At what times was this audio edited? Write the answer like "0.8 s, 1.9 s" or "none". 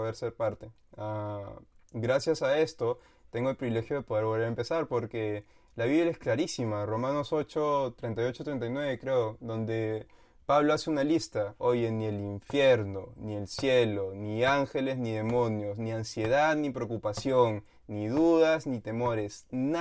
none